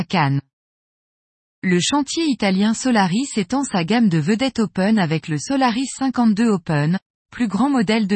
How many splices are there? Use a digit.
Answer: 0